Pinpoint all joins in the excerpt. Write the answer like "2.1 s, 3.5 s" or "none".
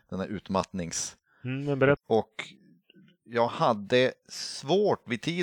2.0 s